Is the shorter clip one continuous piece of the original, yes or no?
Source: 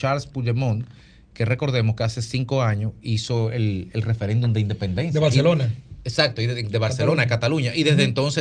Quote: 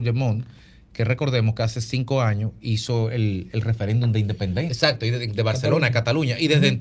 no